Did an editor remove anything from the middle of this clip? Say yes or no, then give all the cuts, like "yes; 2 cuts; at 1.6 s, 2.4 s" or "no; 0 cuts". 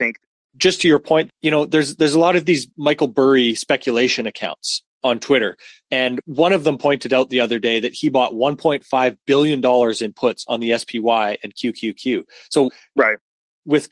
yes; 2 cuts; at 1.3 s, 4.9 s